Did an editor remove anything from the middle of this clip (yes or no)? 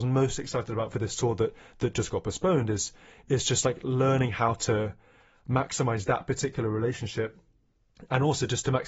no